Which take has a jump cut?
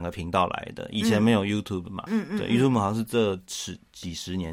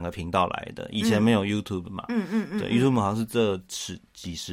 first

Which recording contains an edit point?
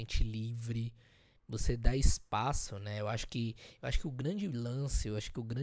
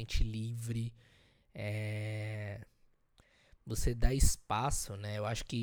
first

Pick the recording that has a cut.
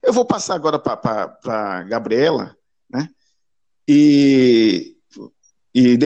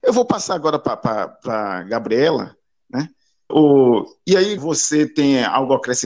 second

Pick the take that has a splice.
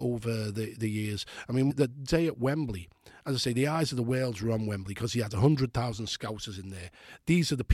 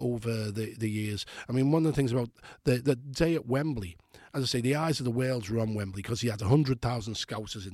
first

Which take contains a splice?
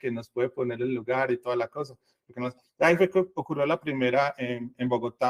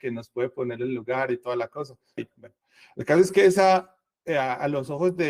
second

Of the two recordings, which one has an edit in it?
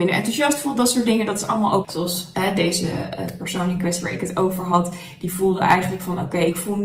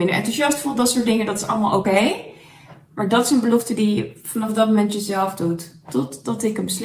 first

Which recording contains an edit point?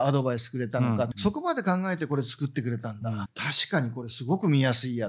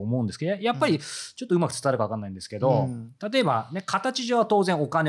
first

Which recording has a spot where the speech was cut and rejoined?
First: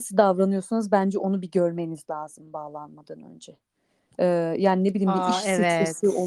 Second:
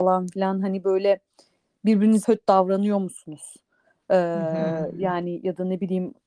second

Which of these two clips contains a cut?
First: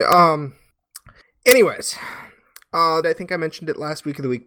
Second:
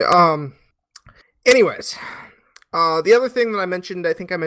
first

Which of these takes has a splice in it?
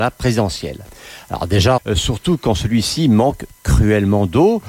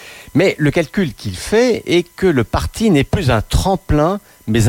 first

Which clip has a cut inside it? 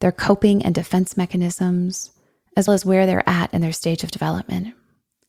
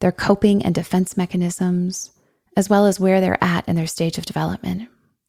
first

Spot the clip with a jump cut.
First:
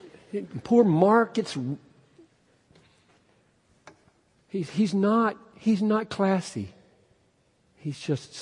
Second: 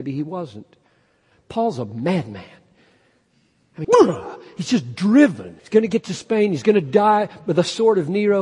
second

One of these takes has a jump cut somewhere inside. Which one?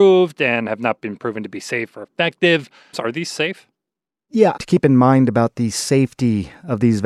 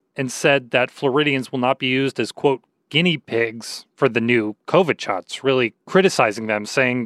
first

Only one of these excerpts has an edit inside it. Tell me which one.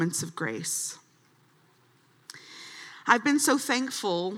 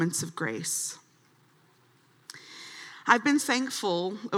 second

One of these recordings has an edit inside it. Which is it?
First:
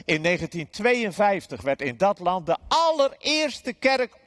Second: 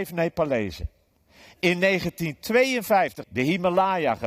second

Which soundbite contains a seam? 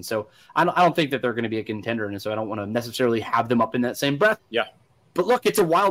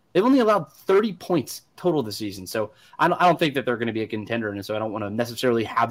first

